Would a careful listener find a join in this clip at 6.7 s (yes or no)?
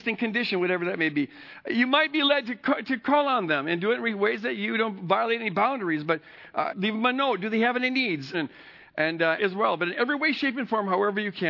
yes